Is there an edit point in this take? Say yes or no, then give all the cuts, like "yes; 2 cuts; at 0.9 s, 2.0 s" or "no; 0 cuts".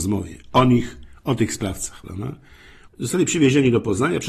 yes; 1 cut; at 2.9 s